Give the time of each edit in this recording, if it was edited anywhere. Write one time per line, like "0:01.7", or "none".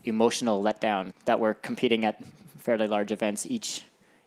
0:01.1